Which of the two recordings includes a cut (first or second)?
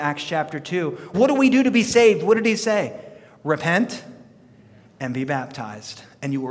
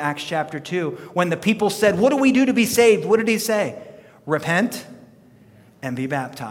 first